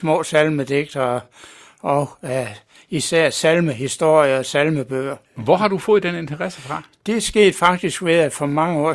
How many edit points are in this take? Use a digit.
1